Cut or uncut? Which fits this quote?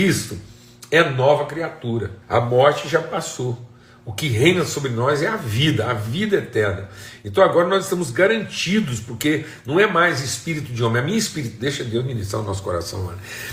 cut